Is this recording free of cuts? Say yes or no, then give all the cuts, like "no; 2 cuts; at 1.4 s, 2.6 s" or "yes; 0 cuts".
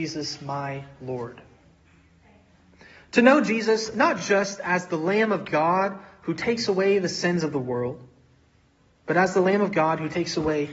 yes; 0 cuts